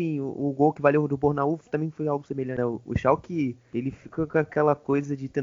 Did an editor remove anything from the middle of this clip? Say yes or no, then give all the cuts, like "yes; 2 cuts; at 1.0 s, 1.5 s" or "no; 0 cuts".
yes; 1 cut; at 2.6 s